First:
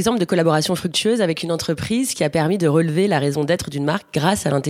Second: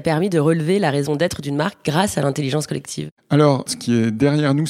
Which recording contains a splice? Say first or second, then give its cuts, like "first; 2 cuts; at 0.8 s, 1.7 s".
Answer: second; 1 cut; at 3.7 s